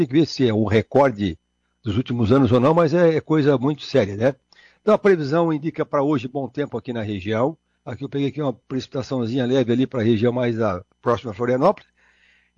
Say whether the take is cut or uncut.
cut